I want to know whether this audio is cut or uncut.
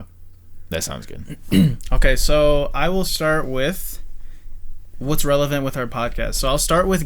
uncut